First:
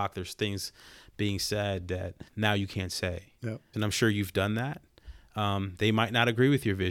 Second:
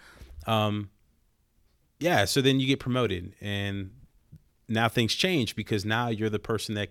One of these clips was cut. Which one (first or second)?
first